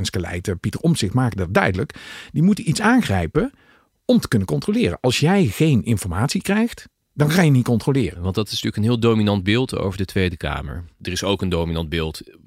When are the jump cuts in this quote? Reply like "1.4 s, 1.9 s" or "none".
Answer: none